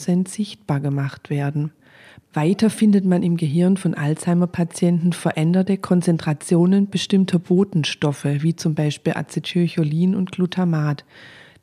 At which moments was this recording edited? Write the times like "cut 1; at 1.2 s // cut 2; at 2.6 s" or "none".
none